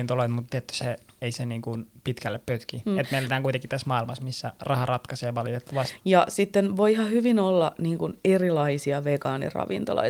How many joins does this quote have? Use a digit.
1